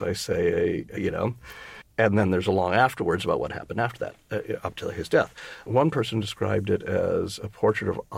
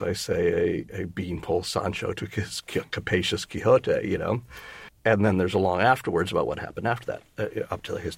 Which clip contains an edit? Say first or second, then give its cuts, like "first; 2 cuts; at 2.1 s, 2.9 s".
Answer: first; 1 cut; at 1.0 s